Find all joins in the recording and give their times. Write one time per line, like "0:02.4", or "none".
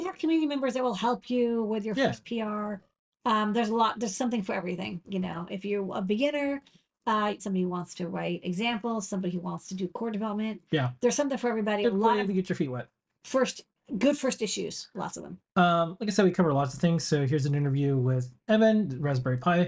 0:07.4
0:18.4